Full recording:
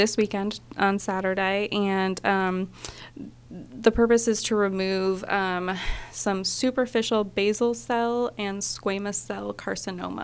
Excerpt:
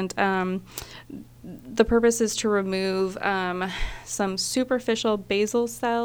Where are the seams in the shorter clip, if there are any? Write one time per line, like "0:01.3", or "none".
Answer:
none